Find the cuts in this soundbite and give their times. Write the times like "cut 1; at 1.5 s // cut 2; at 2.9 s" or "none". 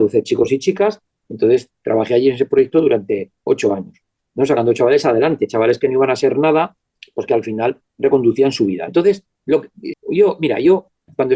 cut 1; at 8.9 s // cut 2; at 9.9 s